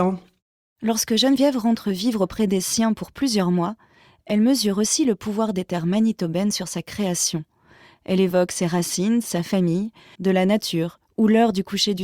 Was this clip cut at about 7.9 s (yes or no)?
no